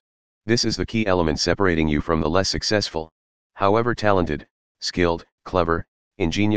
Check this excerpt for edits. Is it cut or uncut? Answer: cut